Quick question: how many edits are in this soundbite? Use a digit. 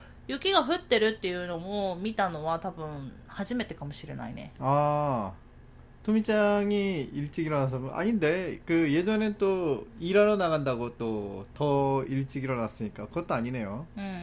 0